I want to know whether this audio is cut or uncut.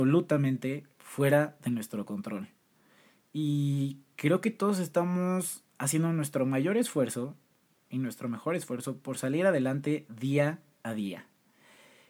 uncut